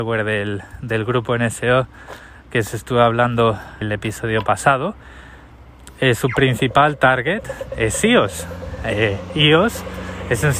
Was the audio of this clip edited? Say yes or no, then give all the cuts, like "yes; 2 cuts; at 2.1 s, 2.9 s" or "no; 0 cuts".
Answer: yes; 1 cut; at 3.8 s